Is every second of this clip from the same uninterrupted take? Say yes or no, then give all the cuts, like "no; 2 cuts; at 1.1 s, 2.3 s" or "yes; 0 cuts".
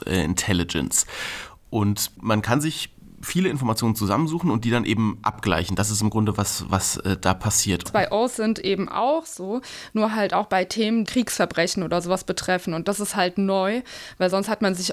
no; 2 cuts; at 7.9 s, 11.1 s